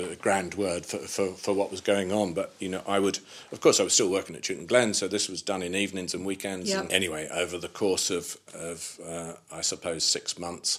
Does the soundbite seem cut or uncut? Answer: cut